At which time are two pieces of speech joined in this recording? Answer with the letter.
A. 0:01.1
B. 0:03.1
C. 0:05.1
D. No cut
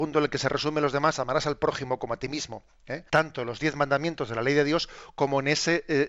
B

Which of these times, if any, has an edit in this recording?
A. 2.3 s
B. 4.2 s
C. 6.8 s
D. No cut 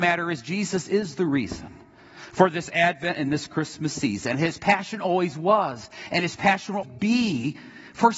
C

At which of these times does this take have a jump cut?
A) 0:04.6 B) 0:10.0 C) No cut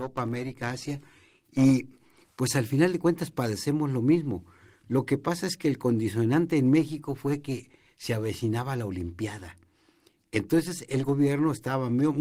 C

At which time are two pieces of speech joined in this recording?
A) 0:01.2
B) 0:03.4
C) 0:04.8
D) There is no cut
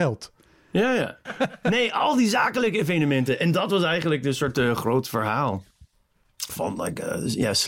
A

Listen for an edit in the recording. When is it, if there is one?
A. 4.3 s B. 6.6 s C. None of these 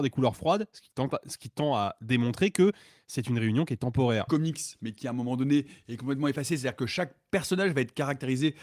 A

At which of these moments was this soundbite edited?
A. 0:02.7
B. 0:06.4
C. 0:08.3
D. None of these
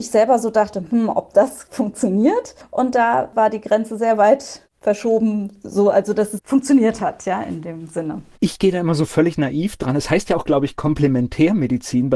B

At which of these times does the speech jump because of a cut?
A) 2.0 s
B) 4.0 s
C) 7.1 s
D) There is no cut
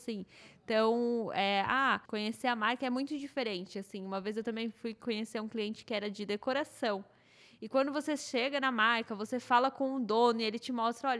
A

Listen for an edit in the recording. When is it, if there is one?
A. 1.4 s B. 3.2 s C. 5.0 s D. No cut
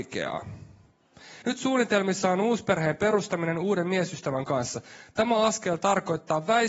A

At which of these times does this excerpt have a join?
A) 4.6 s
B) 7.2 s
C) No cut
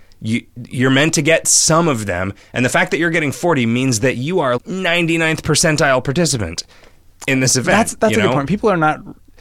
A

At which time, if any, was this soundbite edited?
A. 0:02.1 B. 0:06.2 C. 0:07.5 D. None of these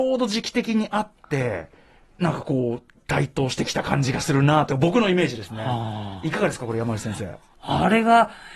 C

